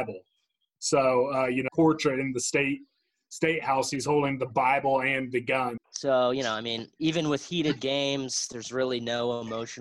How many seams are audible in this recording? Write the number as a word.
two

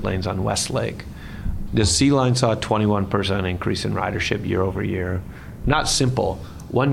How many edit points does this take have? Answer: two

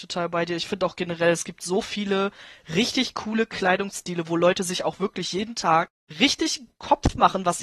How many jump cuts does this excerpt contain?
zero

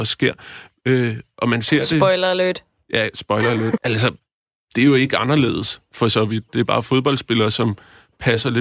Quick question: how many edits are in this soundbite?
one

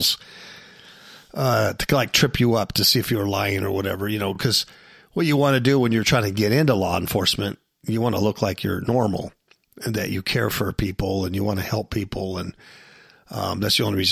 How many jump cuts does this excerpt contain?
zero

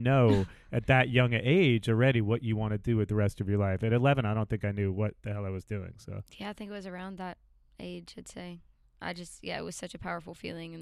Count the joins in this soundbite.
zero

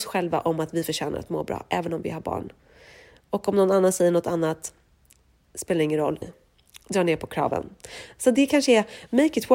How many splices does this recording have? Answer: one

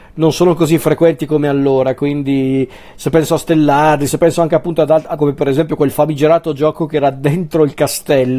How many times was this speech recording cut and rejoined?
two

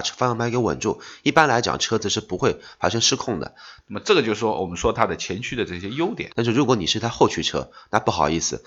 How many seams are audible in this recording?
two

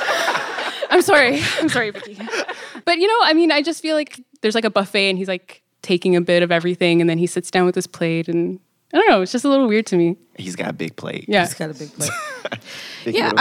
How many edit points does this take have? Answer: zero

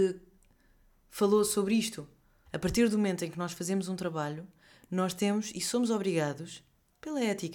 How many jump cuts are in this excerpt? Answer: one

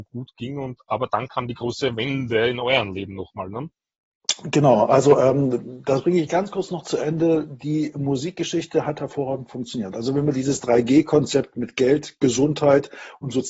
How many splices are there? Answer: zero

